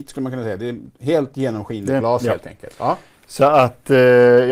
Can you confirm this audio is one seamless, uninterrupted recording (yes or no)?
no